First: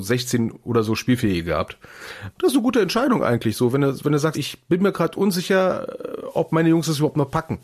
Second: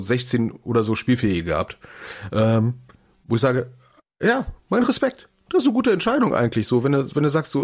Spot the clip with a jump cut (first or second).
first